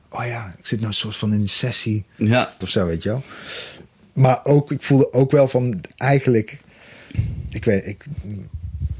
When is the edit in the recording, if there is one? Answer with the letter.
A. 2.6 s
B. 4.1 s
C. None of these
A